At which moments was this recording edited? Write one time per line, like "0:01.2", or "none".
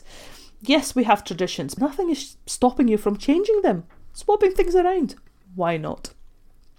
0:01.8